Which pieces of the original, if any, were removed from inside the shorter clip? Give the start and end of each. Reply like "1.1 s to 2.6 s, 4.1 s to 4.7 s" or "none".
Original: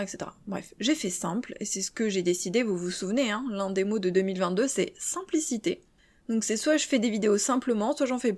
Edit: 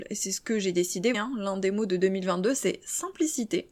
2.6 s to 3.3 s